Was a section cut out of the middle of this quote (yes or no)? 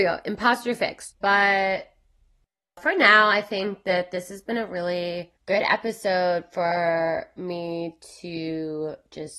yes